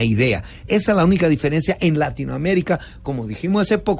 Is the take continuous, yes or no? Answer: yes